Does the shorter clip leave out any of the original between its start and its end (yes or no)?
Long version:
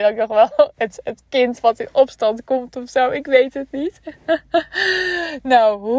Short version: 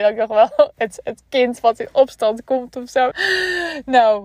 yes